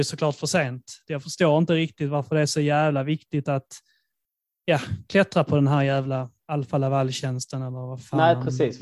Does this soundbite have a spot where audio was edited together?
yes; 1 cut; at 1.1 s

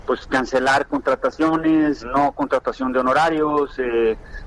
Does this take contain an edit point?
yes; 1 cut; at 2.0 s

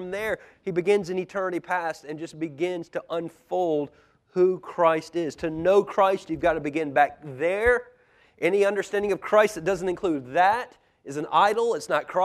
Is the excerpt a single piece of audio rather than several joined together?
yes; 0 cuts

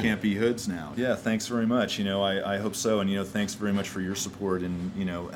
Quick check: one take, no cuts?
no; 1 cut; at 0.9 s

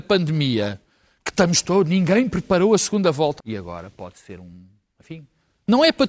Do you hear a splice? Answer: yes; 1 cut; at 3.4 s

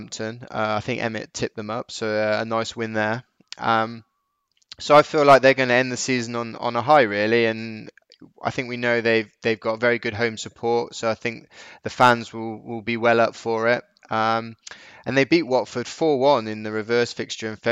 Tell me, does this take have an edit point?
no; 0 cuts

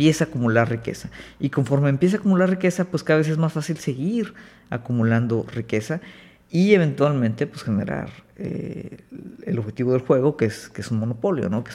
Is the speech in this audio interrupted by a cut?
no; 0 cuts

